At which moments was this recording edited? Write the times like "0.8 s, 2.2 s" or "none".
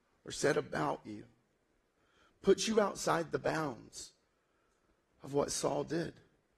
none